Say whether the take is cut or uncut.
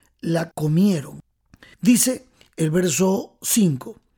cut